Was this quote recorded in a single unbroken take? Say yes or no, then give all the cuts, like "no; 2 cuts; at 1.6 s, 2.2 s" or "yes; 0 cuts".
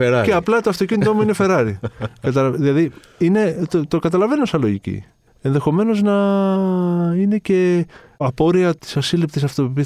yes; 0 cuts